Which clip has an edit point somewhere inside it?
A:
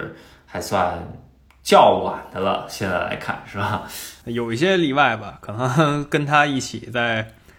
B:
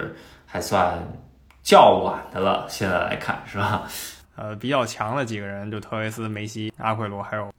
B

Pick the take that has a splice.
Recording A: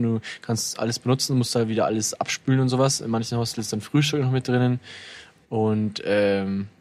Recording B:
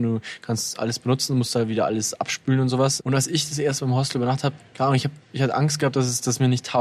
B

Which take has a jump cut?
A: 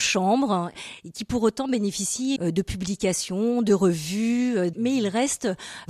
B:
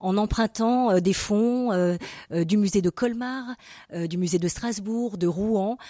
A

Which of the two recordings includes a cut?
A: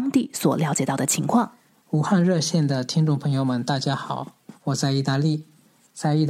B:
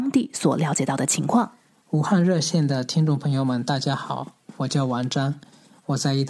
A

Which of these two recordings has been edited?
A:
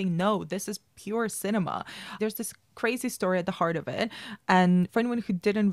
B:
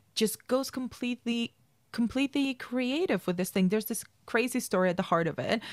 A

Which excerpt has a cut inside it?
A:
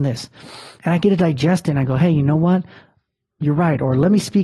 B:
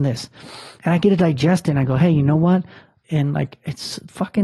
B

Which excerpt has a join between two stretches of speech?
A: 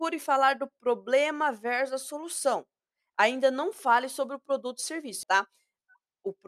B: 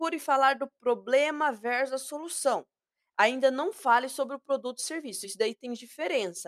A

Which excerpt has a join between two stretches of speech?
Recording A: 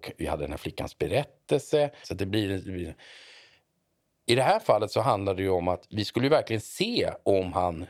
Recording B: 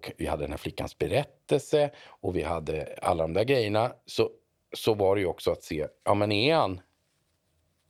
A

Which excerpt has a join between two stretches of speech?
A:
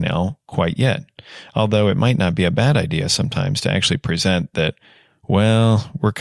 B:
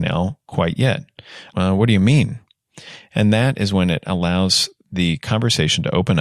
B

